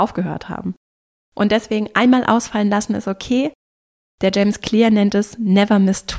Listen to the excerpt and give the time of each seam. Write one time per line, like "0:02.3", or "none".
none